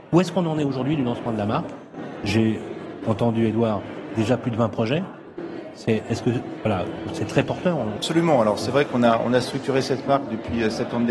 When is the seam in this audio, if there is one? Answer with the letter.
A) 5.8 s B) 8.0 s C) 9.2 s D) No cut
B